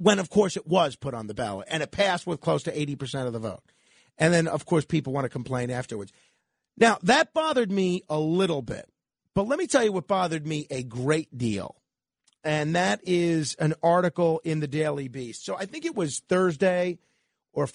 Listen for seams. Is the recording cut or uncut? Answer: uncut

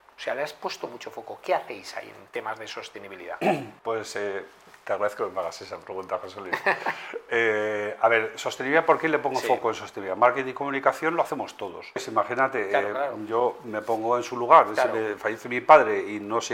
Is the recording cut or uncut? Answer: cut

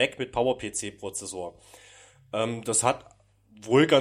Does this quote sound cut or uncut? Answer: uncut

